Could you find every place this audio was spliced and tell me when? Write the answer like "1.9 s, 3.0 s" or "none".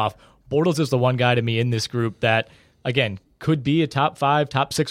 none